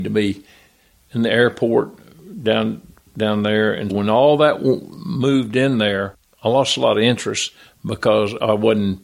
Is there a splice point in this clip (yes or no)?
yes